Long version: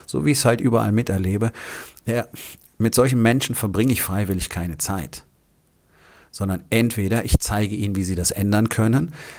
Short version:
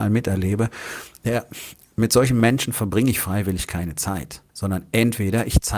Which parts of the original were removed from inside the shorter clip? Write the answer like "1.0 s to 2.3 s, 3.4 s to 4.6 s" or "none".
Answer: 5.3 s to 6.3 s